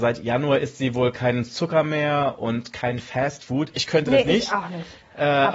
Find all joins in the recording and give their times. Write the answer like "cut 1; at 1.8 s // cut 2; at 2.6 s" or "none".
none